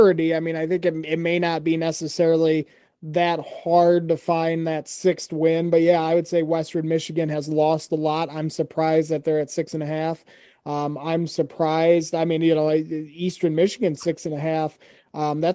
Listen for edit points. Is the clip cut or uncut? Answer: uncut